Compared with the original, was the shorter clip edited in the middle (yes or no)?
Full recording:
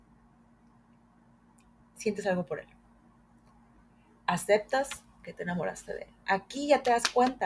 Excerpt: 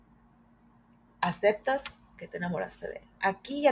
yes